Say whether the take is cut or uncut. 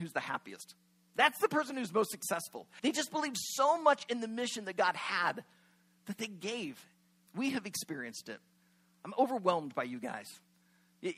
cut